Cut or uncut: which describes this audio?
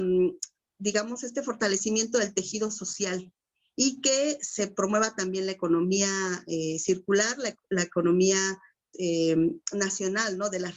cut